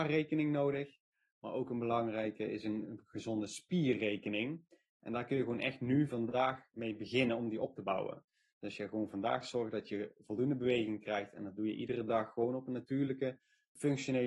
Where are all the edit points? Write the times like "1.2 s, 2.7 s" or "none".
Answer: none